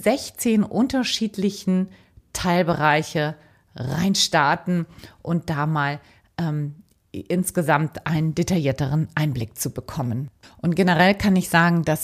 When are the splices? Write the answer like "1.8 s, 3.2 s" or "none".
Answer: 10.4 s